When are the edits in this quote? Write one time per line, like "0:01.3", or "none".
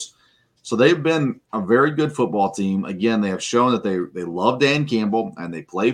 none